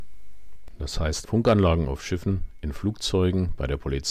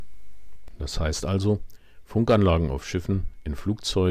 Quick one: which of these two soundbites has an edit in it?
first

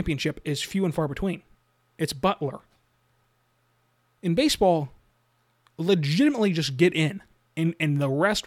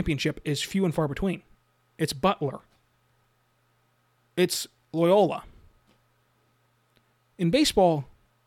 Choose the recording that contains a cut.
first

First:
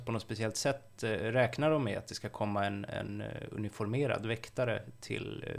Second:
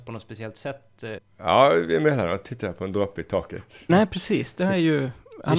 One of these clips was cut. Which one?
second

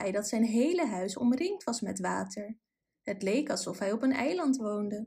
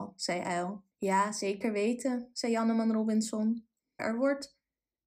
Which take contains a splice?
second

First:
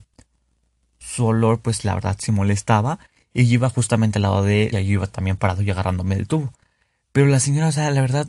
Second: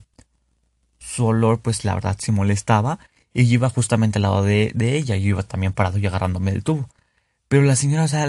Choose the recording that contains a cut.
first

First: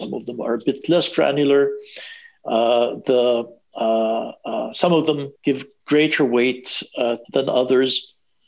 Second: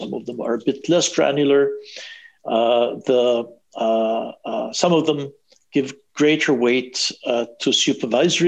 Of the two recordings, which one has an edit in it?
first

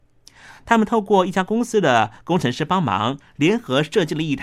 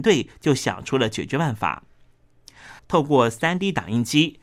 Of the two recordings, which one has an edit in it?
second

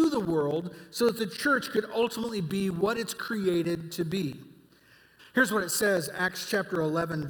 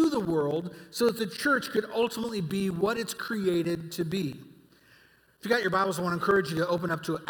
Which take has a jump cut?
first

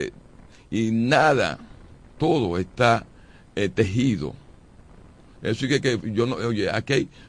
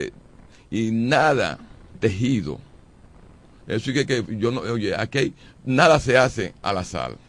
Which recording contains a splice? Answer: second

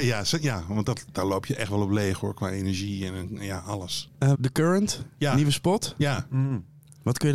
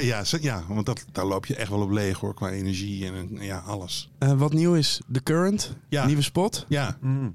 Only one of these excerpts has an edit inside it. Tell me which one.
first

